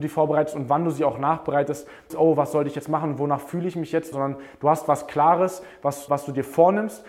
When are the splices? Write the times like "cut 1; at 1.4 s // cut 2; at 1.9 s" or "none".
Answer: cut 1; at 2.1 s // cut 2; at 4.1 s // cut 3; at 6.1 s